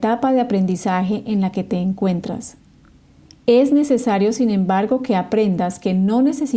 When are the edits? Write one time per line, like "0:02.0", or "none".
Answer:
none